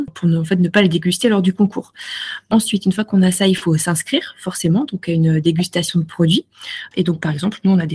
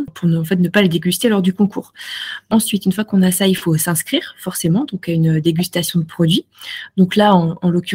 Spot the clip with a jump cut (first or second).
first